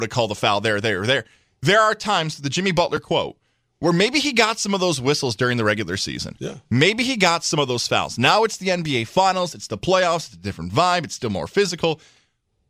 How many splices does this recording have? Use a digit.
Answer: 0